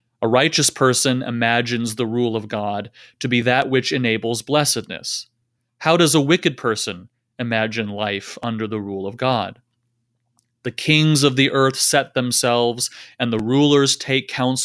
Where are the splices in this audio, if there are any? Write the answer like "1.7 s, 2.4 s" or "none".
none